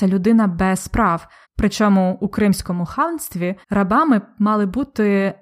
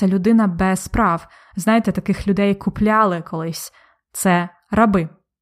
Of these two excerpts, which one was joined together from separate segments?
first; 2 cuts; at 1.4 s, 3.6 s

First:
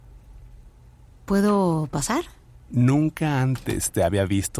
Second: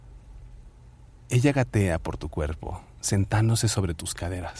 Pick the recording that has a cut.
first; 1 cut; at 1.1 s

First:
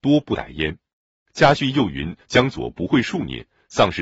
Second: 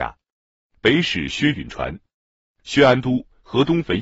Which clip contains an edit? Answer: first; 1 cut; at 1.2 s

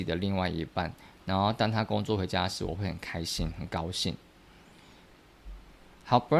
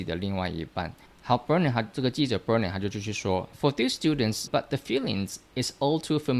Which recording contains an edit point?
second; 2 cuts; at 1.1 s, 4.5 s

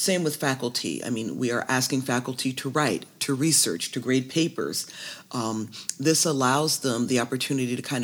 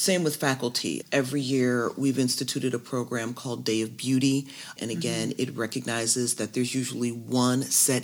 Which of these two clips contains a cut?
second; 2 cuts; at 1.0 s, 4.8 s

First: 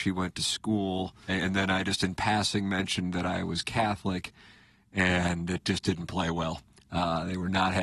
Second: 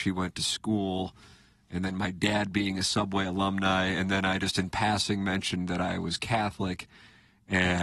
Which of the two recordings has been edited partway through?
first; 1 cut; at 1.3 s

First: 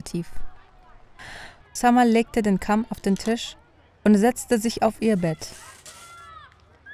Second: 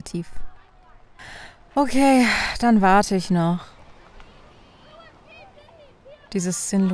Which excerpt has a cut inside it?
first; 1 cut; at 1.6 s

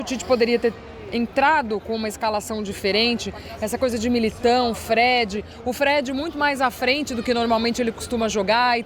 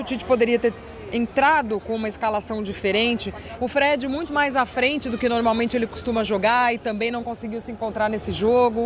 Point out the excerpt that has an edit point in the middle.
second; 1 cut; at 3.6 s

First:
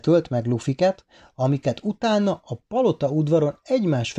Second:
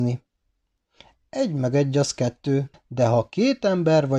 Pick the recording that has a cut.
second; 1 cut; at 2.7 s

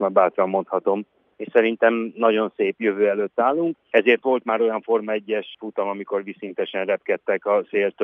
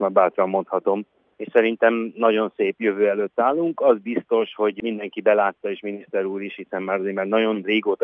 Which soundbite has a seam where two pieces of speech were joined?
first; 1 cut; at 3.7 s

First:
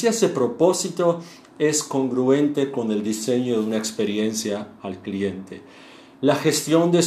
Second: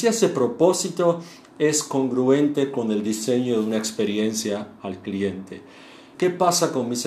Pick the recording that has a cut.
second; 1 cut; at 6.1 s

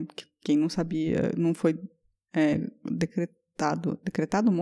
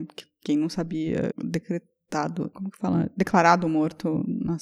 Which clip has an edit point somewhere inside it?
second; 2 cuts; at 1.3 s, 2.5 s

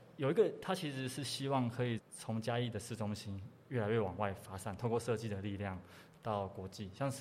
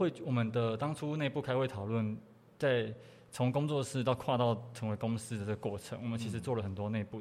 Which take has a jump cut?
first; 1 cut; at 2.0 s

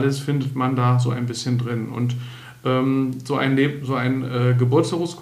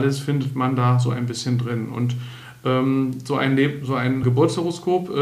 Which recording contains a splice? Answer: second; 1 cut; at 4.2 s

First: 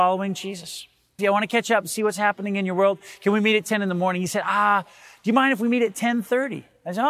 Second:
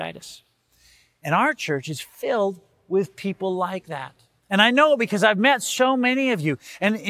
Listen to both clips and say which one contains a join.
first; 1 cut; at 1.2 s

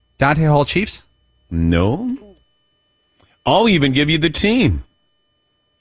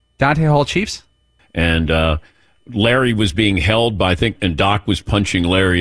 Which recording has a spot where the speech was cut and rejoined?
second; 2 cuts; at 1.4 s, 4.4 s

